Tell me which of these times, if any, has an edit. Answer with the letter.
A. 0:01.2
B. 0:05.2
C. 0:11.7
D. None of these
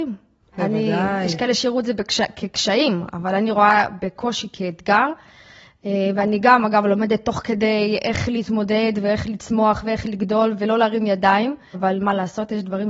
C